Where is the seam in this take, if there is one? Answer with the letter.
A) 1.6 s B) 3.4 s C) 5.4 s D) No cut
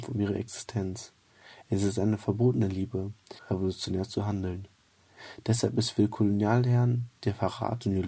B